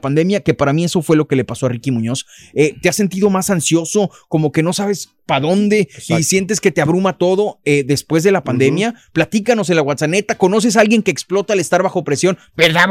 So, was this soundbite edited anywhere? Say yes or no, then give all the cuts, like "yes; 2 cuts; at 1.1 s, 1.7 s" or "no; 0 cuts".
no; 0 cuts